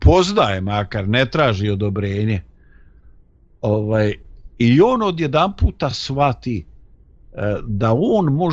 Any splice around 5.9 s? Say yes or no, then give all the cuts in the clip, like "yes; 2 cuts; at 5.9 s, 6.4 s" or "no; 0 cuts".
no; 0 cuts